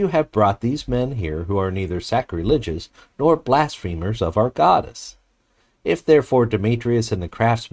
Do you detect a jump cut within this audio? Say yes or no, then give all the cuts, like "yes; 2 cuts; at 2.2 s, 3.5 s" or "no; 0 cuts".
no; 0 cuts